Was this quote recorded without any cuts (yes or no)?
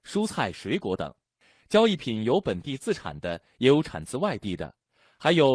yes